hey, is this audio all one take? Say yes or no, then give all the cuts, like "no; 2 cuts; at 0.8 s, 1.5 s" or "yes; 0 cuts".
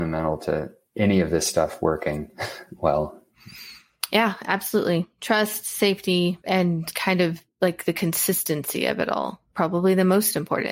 yes; 0 cuts